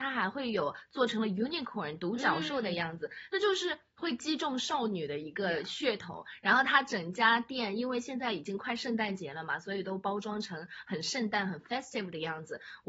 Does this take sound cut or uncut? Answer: uncut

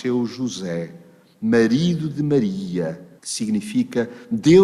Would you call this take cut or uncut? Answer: cut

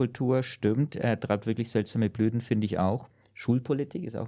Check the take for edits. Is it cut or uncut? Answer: uncut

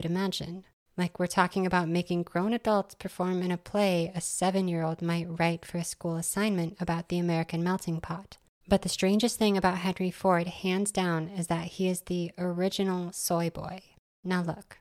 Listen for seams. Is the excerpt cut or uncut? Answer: uncut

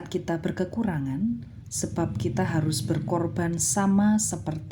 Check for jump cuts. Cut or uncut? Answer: cut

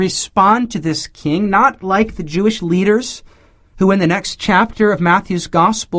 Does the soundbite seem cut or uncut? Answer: uncut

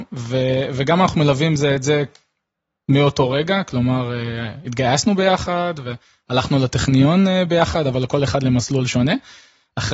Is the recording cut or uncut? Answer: uncut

